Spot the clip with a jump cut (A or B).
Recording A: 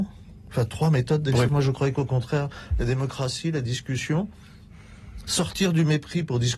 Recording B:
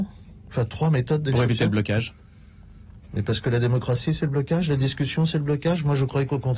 A